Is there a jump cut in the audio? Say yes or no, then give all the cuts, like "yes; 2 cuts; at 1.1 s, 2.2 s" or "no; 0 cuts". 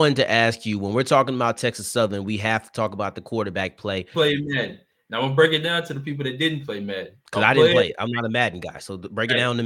yes; 2 cuts; at 4.1 s, 7.2 s